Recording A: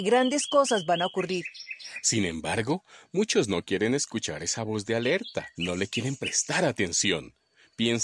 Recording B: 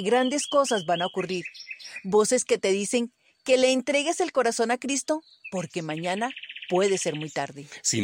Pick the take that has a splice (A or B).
A